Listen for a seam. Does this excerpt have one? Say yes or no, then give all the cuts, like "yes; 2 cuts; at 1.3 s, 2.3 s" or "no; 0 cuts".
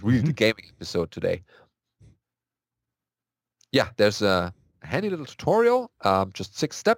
no; 0 cuts